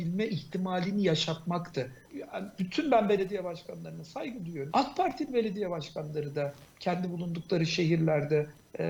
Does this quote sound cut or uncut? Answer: cut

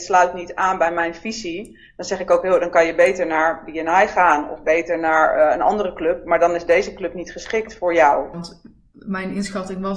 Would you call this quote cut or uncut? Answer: cut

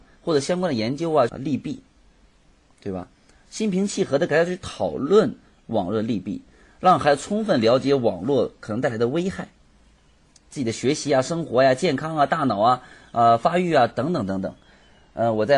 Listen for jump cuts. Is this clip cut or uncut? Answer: cut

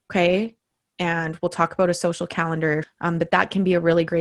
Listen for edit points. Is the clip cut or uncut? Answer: cut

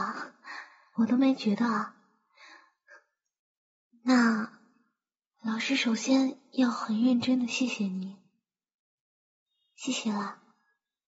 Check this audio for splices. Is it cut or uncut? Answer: cut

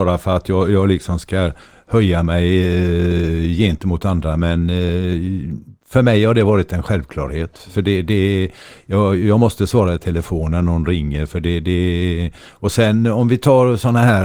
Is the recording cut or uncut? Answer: uncut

